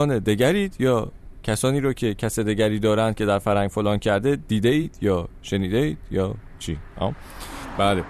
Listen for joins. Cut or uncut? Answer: uncut